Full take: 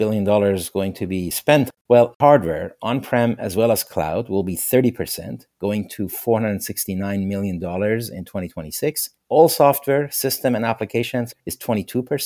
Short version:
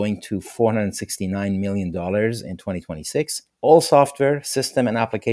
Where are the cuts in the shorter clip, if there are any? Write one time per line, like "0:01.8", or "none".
none